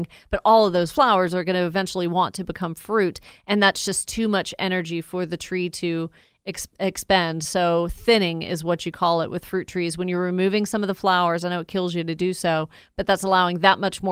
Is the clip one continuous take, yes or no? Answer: yes